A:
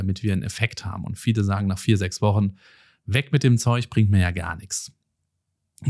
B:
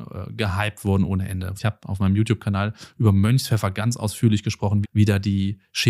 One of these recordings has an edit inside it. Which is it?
B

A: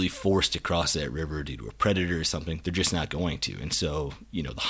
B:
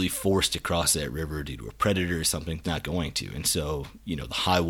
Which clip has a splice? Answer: B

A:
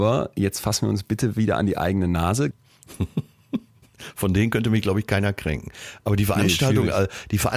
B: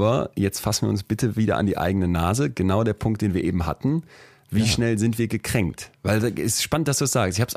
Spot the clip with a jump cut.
A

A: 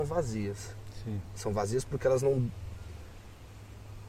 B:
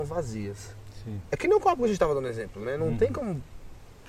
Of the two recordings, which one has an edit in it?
B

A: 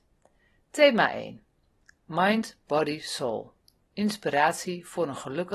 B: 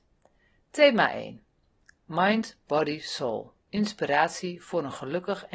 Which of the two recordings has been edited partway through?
B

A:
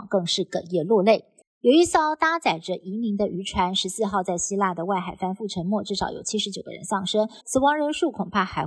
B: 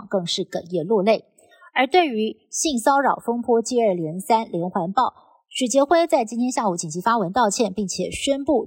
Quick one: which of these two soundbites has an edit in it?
A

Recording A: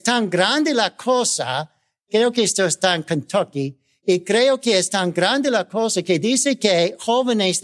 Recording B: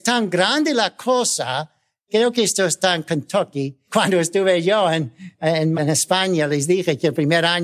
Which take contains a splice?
B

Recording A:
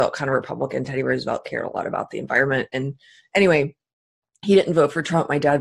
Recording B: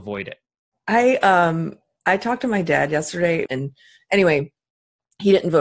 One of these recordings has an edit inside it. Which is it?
B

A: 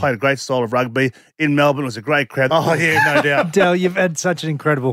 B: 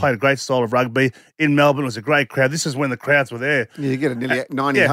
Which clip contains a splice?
A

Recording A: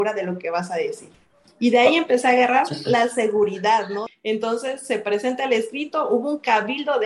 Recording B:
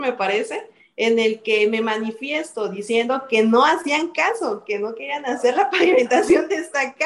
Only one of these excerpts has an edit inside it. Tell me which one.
A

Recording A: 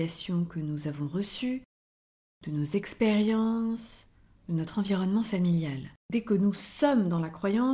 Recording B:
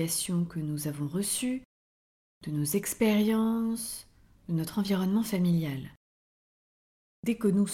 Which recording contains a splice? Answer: A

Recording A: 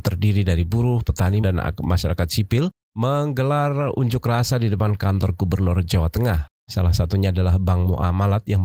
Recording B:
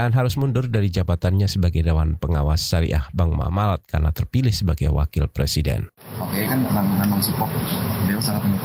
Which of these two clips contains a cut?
A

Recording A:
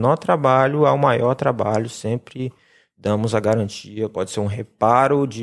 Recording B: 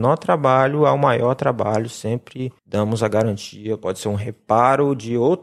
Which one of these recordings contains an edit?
B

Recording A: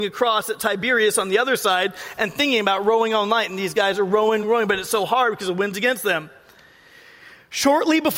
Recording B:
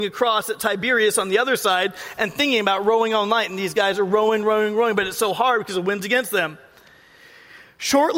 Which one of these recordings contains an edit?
A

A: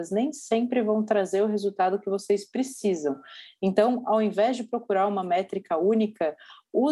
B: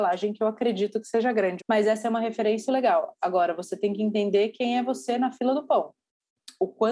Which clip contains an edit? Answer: B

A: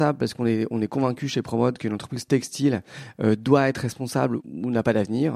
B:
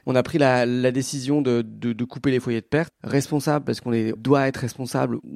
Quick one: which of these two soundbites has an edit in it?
B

